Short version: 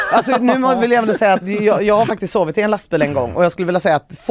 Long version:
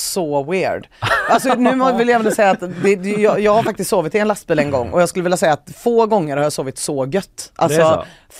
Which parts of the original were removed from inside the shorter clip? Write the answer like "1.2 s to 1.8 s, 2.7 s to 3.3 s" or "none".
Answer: 2.6 s to 3.0 s